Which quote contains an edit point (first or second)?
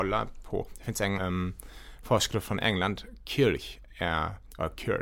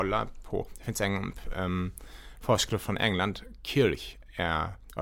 first